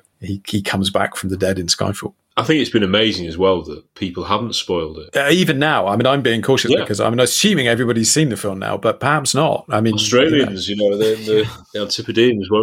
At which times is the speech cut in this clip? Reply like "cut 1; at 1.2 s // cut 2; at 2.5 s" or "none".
cut 1; at 5.1 s